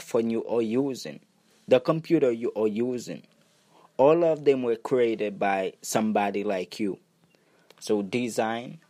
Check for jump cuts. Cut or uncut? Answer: cut